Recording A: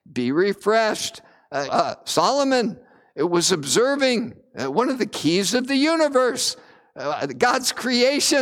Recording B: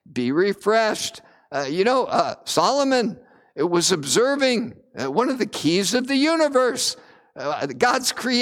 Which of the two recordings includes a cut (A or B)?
A